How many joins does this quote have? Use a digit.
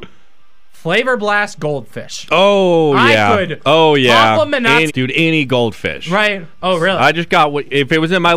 2